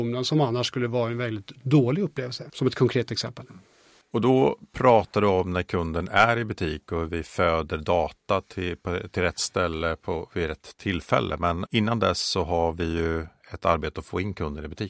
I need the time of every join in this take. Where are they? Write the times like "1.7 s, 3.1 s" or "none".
none